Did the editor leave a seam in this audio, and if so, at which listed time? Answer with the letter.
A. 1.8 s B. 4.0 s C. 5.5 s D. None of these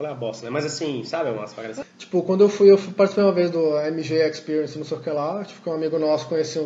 A